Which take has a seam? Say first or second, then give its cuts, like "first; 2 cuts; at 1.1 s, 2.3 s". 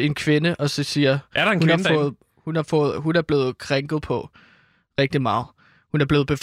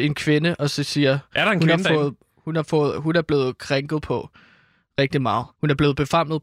second; 1 cut; at 5.5 s